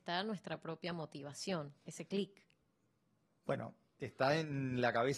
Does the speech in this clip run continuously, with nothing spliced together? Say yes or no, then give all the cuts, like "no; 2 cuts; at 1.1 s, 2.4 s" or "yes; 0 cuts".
no; 1 cut; at 3.9 s